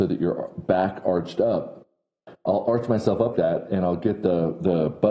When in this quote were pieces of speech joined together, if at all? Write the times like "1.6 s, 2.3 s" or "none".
3.3 s